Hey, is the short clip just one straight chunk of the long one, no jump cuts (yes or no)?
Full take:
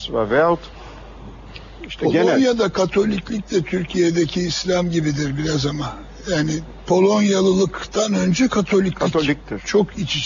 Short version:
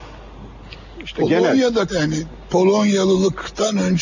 no